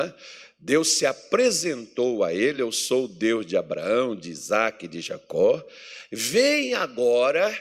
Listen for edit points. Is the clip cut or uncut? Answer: uncut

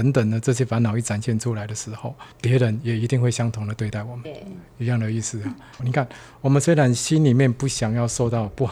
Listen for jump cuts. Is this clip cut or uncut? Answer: cut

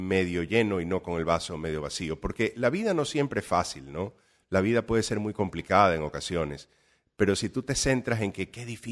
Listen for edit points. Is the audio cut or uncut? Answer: uncut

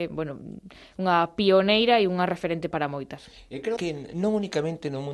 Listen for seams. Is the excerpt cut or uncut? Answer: cut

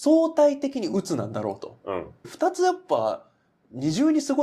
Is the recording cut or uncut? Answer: cut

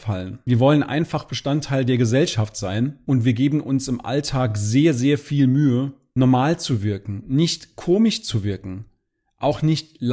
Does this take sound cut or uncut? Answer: uncut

